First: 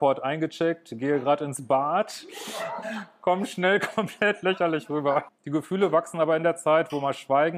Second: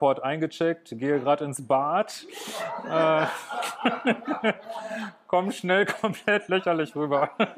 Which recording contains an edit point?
first; 2 cuts; at 2.8 s, 5.3 s

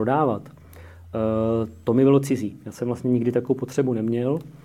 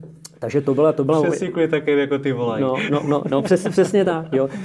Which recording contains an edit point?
second; 1 cut; at 3.0 s

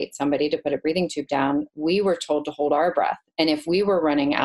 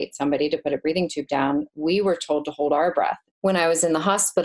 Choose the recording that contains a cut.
second; 1 cut; at 3.3 s

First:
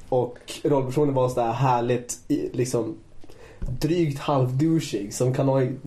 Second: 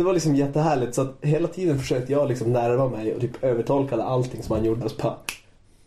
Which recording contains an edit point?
second; 1 cut; at 4.8 s

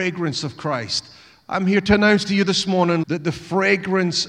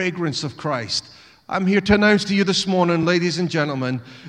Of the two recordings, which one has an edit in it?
first; 1 cut; at 3.0 s

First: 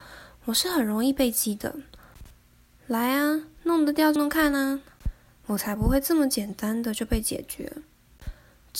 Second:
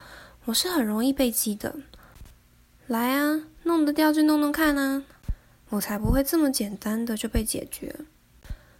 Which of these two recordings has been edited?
first; 1 cut; at 4.2 s

